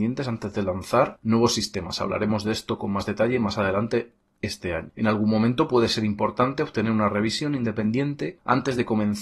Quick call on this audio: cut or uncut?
uncut